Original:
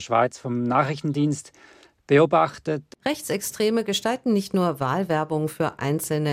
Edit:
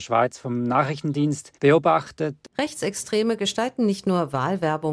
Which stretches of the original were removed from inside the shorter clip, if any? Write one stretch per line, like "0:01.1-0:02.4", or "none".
0:01.5-0:02.0